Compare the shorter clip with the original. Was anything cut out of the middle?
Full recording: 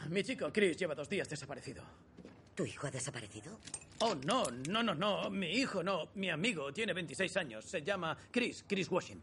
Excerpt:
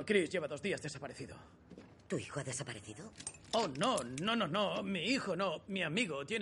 no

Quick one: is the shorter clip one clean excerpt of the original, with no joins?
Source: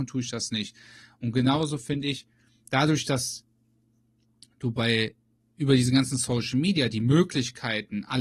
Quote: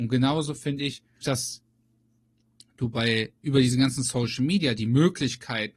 no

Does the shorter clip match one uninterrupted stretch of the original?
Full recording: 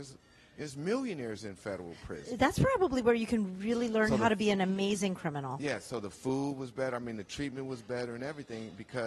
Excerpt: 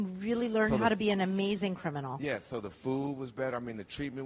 yes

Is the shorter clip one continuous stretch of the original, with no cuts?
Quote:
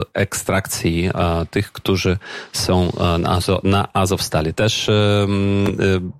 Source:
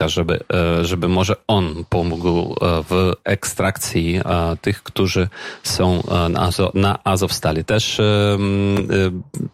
yes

